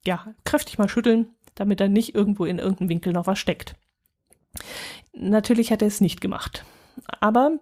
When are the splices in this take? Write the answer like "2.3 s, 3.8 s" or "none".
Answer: 5.0 s